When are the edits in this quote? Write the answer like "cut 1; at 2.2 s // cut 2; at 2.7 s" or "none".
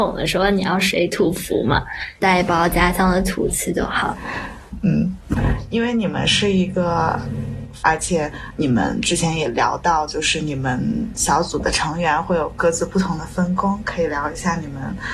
cut 1; at 7.8 s